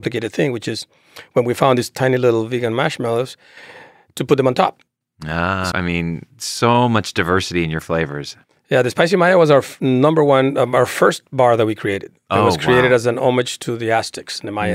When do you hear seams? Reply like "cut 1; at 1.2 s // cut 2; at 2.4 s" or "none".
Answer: cut 1; at 5.7 s